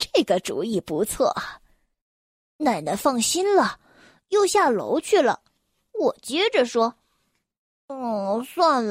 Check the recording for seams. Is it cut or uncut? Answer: uncut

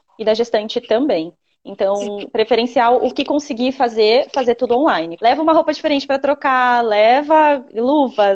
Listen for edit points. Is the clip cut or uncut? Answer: cut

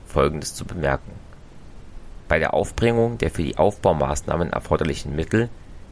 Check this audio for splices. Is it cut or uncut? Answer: cut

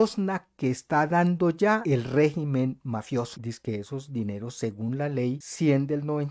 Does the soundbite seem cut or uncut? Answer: cut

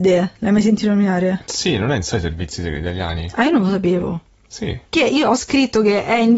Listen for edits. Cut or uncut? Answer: cut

